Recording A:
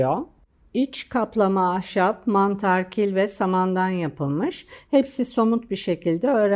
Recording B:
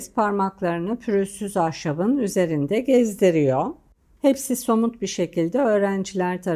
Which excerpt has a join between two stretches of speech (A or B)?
B